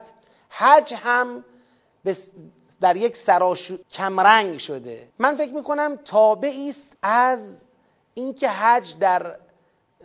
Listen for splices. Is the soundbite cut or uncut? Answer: cut